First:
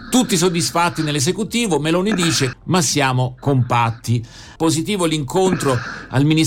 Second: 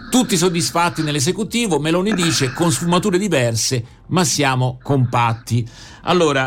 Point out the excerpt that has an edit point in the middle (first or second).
first